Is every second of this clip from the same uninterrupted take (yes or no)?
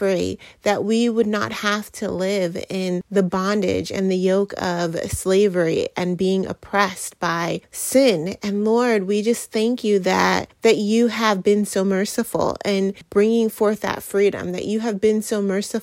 yes